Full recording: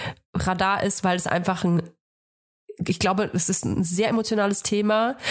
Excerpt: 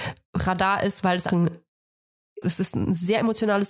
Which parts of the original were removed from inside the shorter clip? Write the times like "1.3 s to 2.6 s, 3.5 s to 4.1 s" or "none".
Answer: 1.3 s to 1.6 s, 2.7 s to 3.3 s